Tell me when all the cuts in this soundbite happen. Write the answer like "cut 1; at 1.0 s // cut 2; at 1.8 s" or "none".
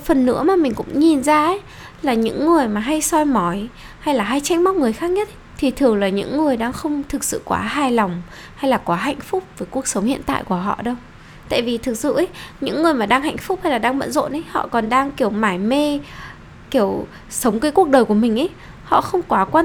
cut 1; at 5.5 s